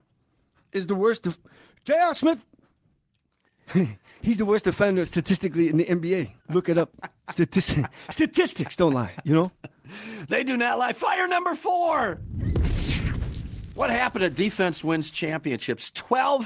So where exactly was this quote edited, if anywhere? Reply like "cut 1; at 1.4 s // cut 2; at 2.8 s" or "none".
cut 1; at 6.4 s